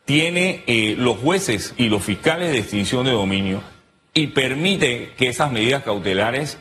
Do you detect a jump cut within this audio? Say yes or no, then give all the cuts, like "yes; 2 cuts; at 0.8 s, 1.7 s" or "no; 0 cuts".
yes; 1 cut; at 1.8 s